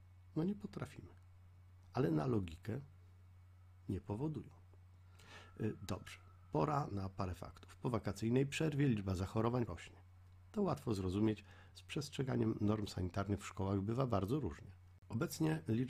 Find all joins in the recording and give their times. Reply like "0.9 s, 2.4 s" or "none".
9.7 s, 11.7 s

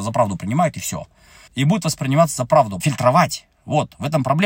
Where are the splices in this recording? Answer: 1.5 s, 2.8 s

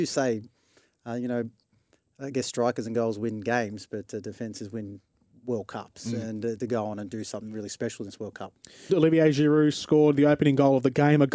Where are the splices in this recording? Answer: 6.6 s, 8.9 s

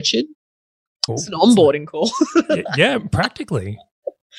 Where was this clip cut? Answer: 1.1 s

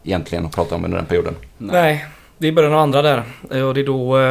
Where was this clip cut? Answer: none

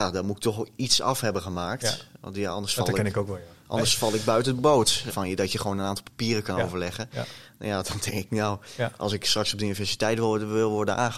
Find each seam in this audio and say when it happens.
5.1 s

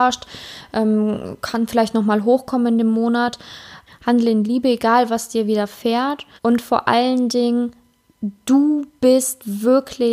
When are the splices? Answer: 3.9 s, 6.4 s

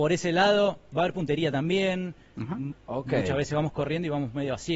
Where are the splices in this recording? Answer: 0.9 s, 2.7 s

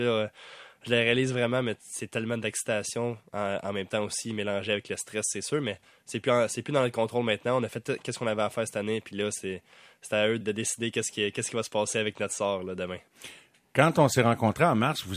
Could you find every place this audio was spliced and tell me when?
10.4 s

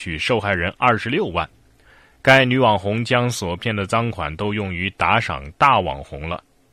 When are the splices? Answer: none

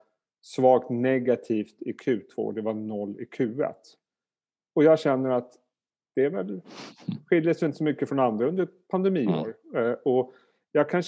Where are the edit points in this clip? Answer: 6.0 s

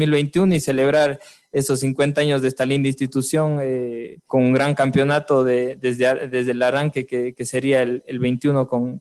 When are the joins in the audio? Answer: 4.3 s

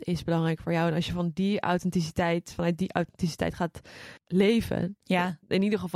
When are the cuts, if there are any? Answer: 4.2 s

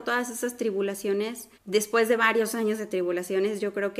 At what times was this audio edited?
1.5 s

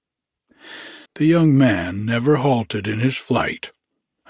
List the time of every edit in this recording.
1.1 s

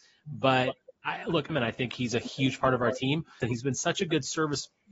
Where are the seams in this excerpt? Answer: 1.5 s, 3.4 s

